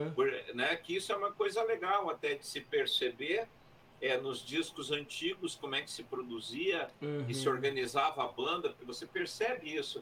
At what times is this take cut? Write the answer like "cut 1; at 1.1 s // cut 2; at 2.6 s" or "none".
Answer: none